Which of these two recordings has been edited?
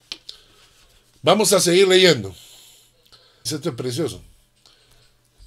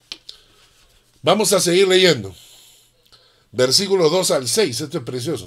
first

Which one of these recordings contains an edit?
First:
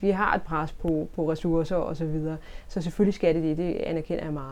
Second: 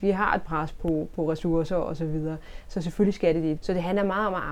second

